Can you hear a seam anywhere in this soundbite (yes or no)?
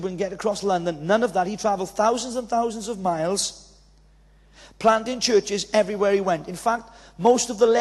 no